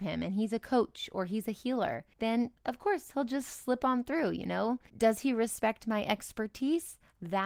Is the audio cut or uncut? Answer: uncut